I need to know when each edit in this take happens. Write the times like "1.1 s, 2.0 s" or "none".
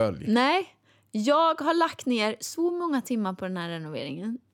none